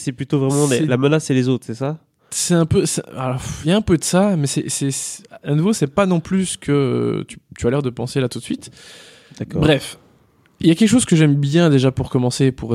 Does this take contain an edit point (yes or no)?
no